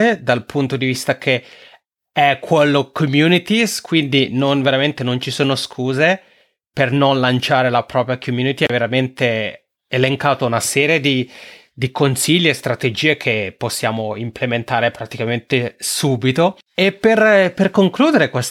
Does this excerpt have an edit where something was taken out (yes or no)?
no